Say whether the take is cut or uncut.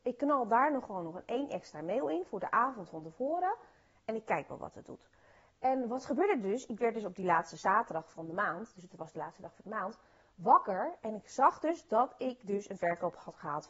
uncut